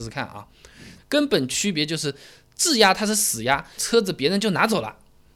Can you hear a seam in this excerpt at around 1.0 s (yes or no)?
yes